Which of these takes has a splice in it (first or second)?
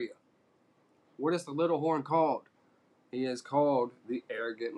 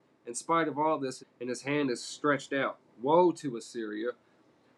second